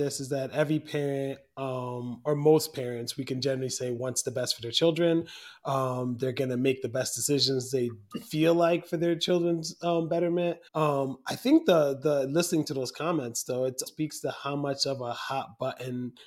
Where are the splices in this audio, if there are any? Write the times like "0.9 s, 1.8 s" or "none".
10.7 s, 13.9 s